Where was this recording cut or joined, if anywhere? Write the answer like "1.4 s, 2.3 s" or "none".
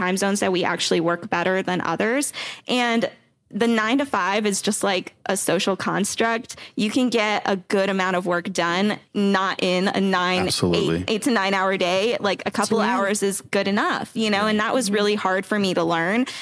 none